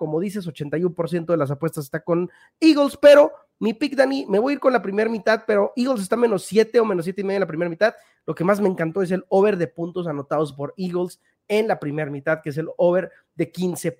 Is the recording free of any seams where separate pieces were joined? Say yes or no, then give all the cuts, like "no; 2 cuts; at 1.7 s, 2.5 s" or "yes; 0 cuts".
yes; 0 cuts